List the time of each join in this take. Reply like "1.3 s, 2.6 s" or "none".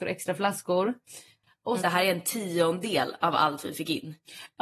1.8 s